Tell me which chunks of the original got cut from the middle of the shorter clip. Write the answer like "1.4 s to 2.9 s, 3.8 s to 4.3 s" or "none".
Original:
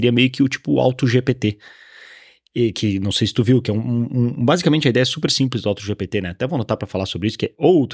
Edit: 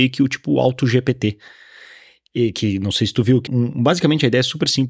3.7 s to 4.1 s